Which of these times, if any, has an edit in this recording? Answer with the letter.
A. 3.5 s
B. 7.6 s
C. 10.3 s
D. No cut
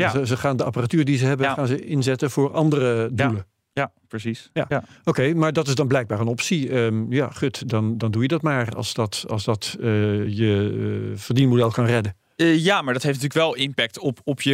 D